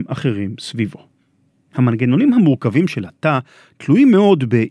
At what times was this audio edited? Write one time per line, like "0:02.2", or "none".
none